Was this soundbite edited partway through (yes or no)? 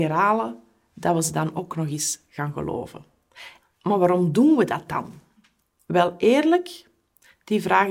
yes